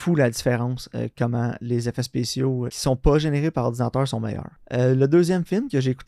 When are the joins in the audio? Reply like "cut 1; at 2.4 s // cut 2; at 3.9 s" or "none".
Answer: cut 1; at 2.7 s